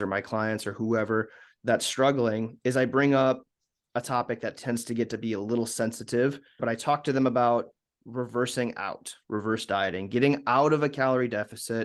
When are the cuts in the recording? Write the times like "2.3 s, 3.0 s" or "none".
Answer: 6.6 s

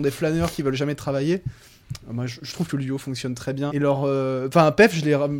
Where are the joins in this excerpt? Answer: 3.7 s

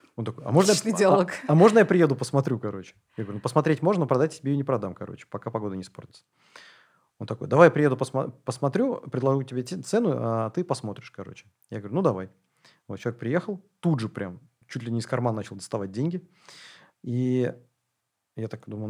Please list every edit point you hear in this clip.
14.6 s, 16.9 s

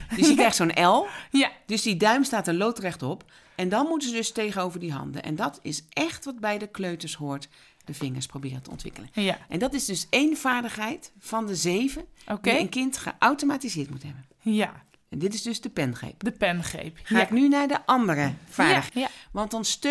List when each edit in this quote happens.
7.8 s, 18.9 s

